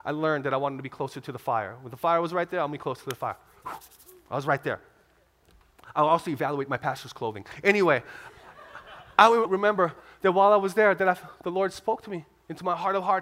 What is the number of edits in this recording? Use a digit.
1